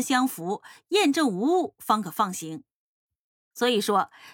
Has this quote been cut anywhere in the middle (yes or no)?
no